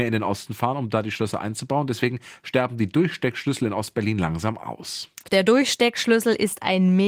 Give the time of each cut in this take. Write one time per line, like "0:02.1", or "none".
0:05.2